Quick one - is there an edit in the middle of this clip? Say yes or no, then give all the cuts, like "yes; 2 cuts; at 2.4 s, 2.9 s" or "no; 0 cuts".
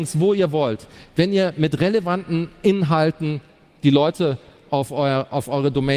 no; 0 cuts